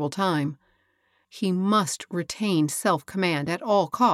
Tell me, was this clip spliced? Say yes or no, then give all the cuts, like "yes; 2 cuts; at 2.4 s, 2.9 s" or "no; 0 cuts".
yes; 1 cut; at 1.2 s